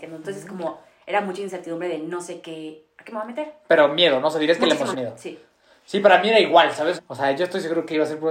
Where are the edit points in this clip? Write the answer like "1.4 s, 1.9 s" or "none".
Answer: 4.9 s, 7.0 s

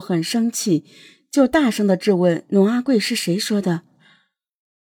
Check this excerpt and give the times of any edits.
none

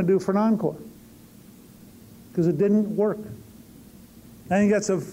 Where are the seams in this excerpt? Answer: none

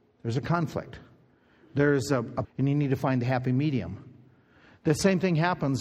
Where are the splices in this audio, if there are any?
2.4 s

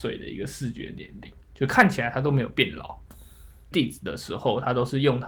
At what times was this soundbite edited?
3.7 s

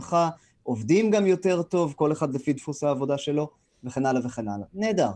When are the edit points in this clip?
none

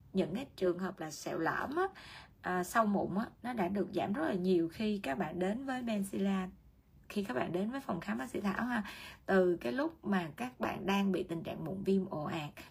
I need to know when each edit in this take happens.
none

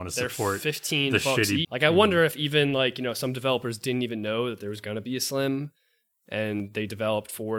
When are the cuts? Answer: 1.6 s

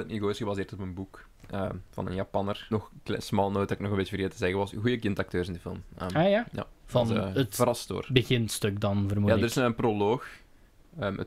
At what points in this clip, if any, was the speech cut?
2.7 s

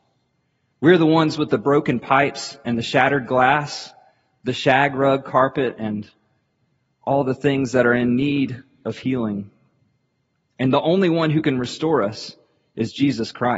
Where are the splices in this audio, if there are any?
none

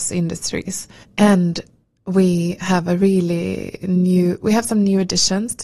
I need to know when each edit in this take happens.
1.0 s

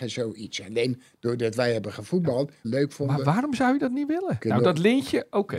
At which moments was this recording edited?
2.6 s, 4.4 s

